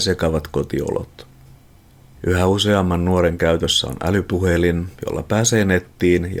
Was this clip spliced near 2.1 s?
yes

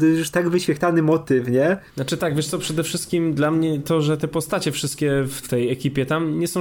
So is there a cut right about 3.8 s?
no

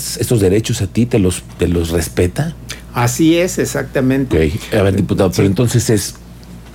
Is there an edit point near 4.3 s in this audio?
yes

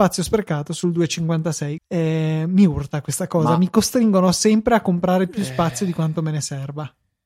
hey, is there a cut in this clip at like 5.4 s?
no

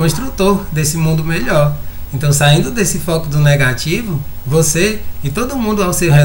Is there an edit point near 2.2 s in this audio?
no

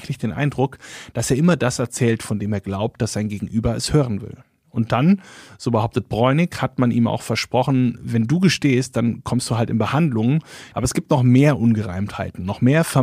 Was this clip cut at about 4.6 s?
yes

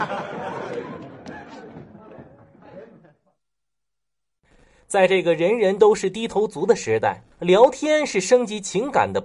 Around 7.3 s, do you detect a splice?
yes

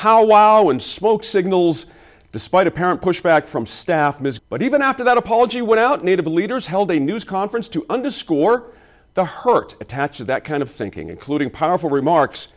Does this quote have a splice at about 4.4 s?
yes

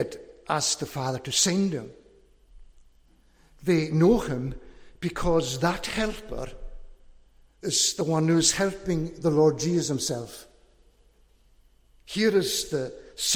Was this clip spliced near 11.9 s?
no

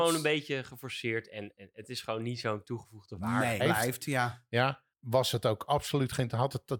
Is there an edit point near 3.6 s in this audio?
yes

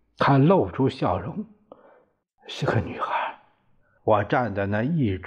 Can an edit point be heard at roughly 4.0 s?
yes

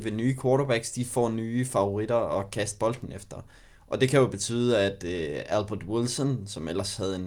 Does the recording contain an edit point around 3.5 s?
no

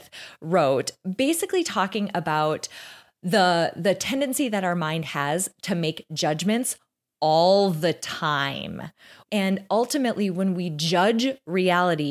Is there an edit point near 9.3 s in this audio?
yes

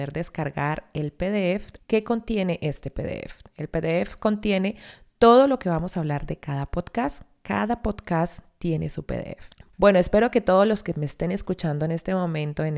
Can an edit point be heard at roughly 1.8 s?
yes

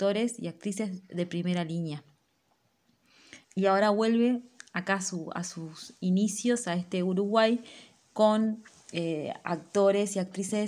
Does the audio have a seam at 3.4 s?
yes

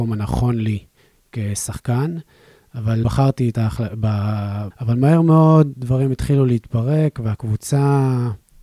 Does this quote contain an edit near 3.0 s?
yes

